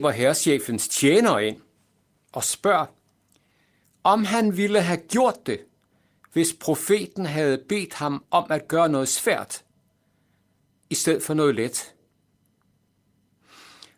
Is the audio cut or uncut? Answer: uncut